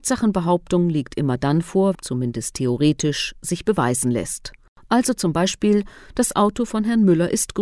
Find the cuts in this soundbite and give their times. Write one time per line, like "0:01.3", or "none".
0:01.9